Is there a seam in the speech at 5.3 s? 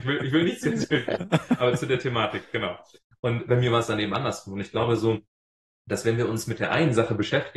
no; 0 cuts

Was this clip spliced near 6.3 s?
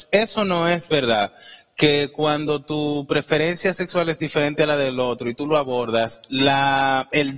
no; 0 cuts

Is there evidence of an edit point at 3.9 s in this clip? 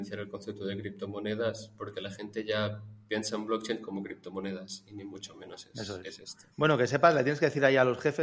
no; 1 cut; at 6.5 s

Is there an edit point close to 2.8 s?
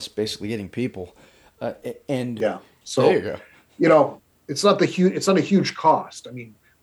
yes; 2 cuts; at 2.8 s, 4.3 s

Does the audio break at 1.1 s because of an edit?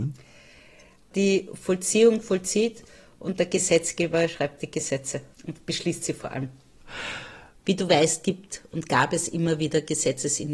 no; 2 cuts; at 5.3 s, 7.6 s

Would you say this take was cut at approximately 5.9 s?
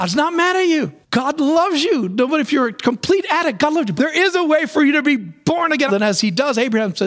yes; 3 cuts; at 1.0 s, 4.0 s, 5.9 s

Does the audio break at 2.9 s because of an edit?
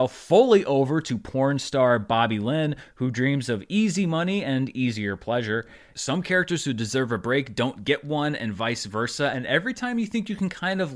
no; 1 cut; at 5.9 s

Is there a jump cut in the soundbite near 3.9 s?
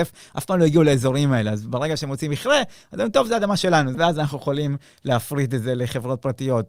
yes; 1 cut; at 3.9 s

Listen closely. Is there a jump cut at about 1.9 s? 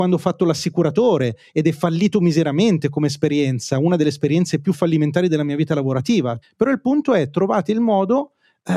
no; 1 cut; at 6.4 s

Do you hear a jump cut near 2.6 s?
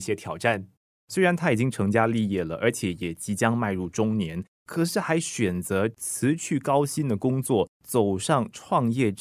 no; 1 cut; at 1.0 s

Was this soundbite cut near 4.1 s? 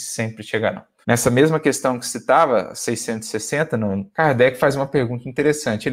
yes; 2 cuts; at 1.0 s, 4.1 s

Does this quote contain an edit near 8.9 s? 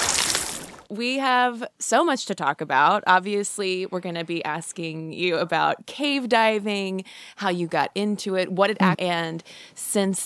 yes; 1 cut; at 8.9 s

